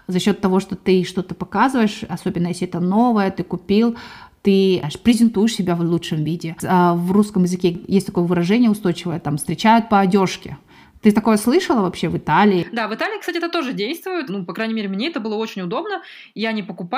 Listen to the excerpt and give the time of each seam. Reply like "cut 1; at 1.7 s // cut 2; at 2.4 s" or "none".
cut 1; at 14.3 s